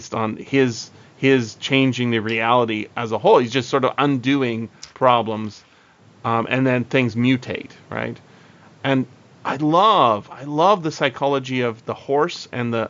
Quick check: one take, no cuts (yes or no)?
yes